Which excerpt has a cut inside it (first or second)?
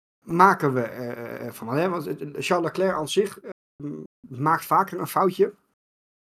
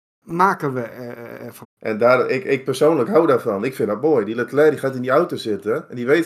second